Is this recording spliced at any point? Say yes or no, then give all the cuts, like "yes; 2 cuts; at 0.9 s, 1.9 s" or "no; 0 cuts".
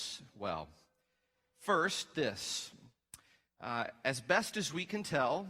no; 0 cuts